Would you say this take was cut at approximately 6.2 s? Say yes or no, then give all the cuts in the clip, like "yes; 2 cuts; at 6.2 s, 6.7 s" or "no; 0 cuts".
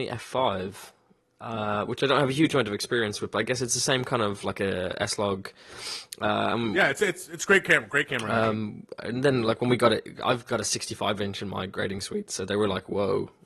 no; 0 cuts